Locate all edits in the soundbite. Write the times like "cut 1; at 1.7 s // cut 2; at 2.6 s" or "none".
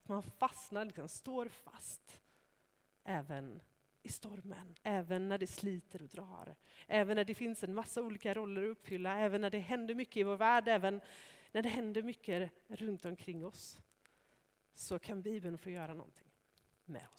cut 1; at 4.8 s